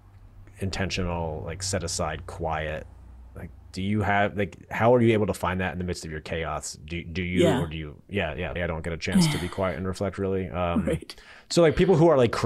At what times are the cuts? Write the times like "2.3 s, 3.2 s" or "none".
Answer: 8.6 s